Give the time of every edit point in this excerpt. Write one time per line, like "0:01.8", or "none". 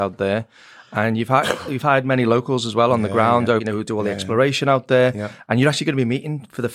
0:03.6